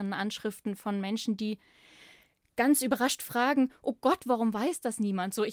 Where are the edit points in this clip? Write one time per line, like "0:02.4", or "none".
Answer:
none